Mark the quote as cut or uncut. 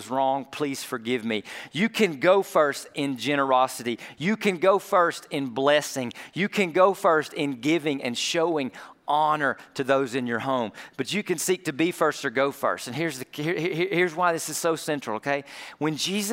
uncut